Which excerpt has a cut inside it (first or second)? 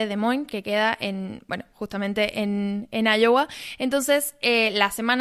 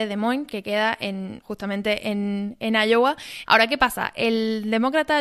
second